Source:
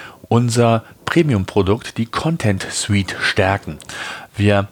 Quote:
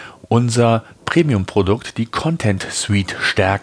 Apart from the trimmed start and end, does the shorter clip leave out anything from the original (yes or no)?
no